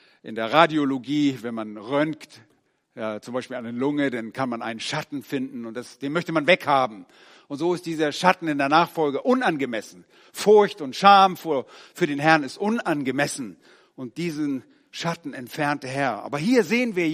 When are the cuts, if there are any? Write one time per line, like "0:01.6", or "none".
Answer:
none